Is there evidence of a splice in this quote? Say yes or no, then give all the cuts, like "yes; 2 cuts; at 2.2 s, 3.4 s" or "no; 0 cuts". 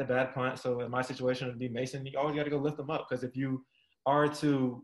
no; 0 cuts